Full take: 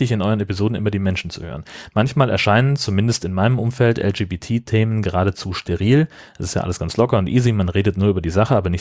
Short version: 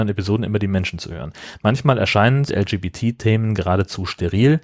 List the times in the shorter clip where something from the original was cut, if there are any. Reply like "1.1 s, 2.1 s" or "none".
2.5 s